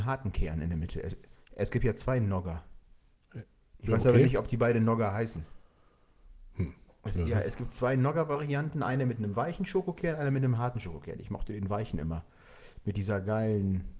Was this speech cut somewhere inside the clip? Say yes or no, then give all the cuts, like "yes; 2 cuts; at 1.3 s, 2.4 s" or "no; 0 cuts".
no; 0 cuts